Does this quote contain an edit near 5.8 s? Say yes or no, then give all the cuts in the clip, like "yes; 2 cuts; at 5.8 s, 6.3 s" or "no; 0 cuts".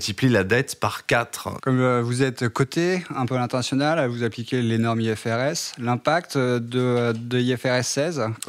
no; 1 cut; at 1.6 s